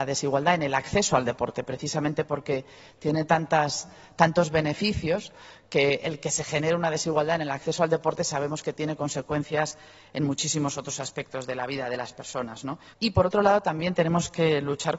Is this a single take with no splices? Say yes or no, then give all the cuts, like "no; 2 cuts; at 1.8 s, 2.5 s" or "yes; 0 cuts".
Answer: no; 1 cut; at 12.9 s